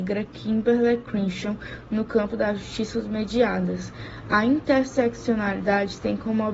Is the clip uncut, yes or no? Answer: yes